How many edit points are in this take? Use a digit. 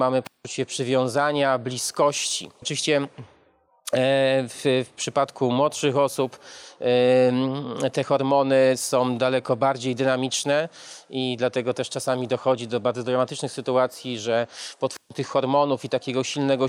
1